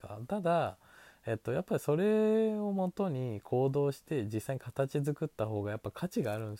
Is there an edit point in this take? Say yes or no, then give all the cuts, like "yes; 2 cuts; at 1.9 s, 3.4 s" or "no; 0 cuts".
no; 0 cuts